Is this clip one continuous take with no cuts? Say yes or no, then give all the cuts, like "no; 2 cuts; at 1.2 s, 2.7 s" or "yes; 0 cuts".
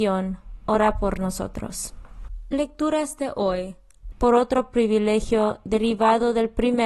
no; 1 cut; at 4.1 s